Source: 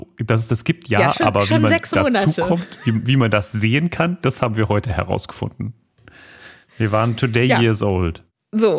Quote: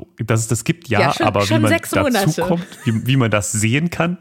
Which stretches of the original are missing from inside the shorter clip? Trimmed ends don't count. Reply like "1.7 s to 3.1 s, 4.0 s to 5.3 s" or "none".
none